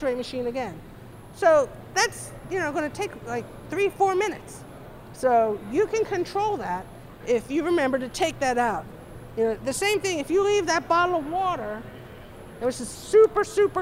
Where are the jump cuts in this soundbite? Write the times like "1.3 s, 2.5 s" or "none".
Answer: none